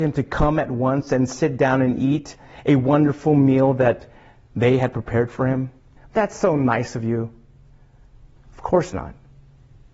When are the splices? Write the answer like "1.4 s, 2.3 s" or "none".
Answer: 6.0 s, 8.4 s